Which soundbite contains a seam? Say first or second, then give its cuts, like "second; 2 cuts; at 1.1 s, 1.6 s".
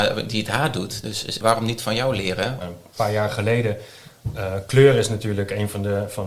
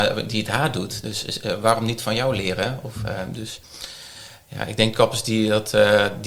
first; 2 cuts; at 1.4 s, 2.6 s